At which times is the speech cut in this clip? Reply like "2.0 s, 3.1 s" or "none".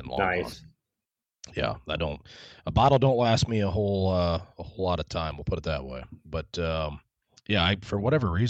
none